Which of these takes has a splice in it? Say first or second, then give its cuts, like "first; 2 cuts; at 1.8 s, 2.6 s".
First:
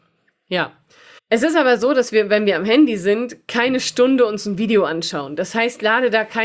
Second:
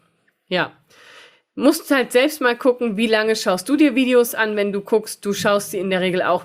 first; 1 cut; at 1.2 s